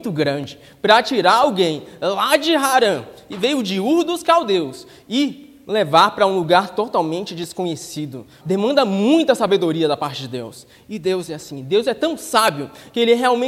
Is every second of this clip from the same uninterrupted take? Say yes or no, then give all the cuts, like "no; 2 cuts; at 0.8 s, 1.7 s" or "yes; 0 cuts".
no; 1 cut; at 8.4 s